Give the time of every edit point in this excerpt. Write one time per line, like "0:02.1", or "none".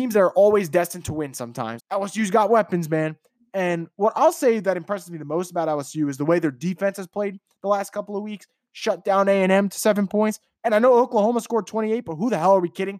0:01.8
0:10.6